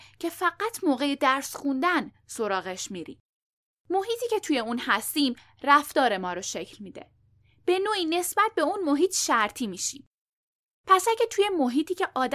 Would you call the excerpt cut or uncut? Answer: cut